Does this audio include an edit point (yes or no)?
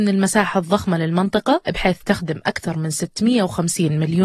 yes